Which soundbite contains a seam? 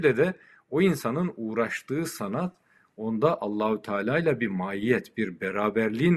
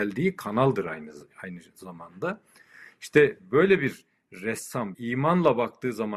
second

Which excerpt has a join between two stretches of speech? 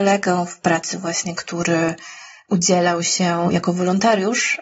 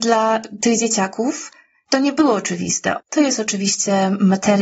second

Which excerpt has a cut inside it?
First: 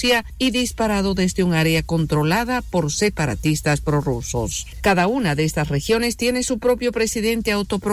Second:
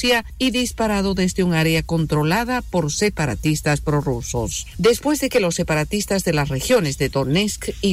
first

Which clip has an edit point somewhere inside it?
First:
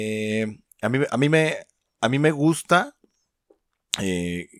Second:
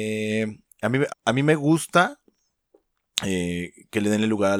second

